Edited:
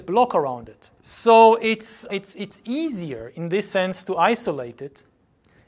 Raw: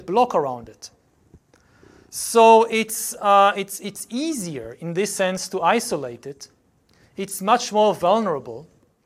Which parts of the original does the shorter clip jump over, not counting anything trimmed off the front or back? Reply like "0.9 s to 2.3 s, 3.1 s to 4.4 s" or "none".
1.0 s to 2.1 s, 3.2 s to 3.5 s